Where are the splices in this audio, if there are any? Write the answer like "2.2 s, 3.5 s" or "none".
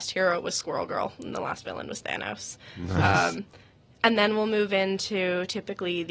none